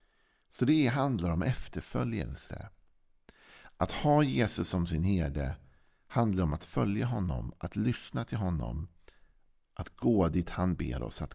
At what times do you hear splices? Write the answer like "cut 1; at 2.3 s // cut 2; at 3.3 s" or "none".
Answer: none

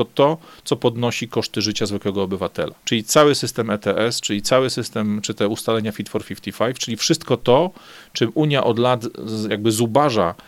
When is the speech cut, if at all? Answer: cut 1; at 2.8 s

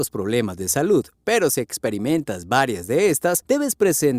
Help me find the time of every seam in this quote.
none

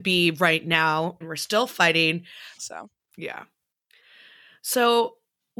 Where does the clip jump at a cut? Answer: cut 1; at 1.2 s // cut 2; at 2.6 s

